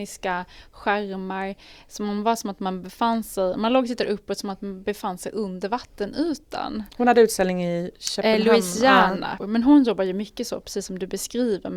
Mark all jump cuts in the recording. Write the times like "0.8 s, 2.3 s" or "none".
9.4 s